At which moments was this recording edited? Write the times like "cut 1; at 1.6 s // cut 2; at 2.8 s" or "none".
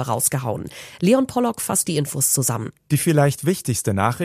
none